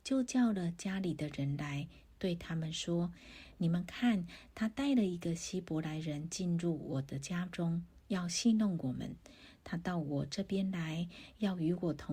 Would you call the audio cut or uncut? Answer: uncut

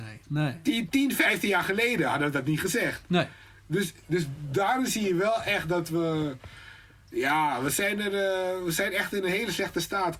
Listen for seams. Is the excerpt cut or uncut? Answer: uncut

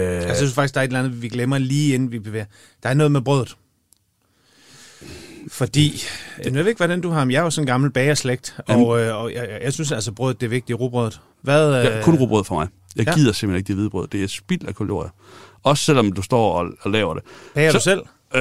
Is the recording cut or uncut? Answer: cut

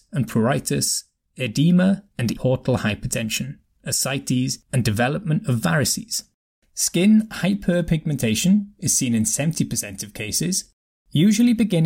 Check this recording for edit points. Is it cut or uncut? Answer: cut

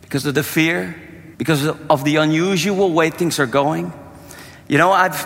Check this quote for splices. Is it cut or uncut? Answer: cut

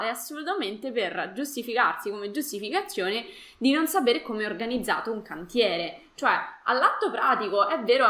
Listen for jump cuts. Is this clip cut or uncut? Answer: uncut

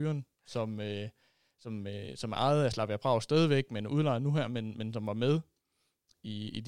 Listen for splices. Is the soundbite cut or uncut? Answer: uncut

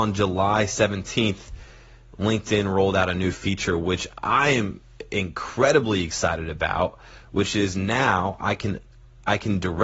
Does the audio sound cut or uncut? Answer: uncut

